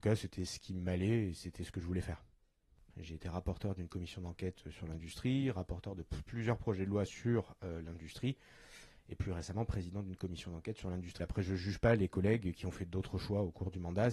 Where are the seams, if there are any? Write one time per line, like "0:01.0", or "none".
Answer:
0:02.9
0:11.2